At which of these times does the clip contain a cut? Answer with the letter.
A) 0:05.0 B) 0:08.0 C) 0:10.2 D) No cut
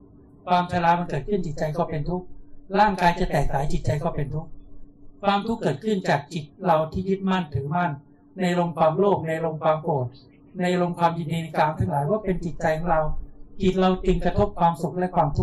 D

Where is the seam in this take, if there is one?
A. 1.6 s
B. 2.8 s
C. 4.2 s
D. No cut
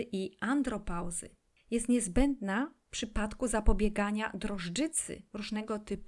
A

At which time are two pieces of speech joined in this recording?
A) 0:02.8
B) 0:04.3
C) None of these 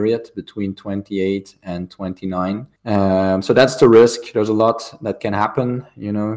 A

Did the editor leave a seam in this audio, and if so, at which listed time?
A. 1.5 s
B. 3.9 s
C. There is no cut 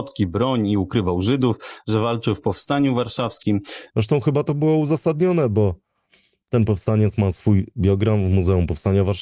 B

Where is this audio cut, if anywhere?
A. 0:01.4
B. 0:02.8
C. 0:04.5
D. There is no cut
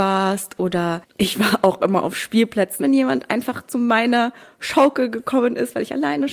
B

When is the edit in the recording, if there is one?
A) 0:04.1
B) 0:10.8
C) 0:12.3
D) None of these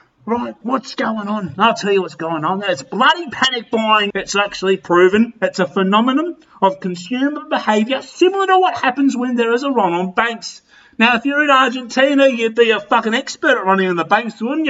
A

